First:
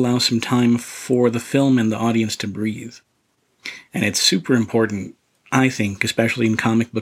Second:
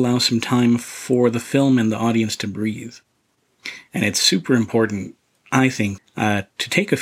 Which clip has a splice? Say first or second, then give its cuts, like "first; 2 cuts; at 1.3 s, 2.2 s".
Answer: second; 1 cut; at 6.0 s